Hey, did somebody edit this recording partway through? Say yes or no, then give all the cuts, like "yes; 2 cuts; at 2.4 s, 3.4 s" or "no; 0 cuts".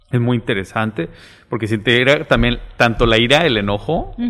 no; 0 cuts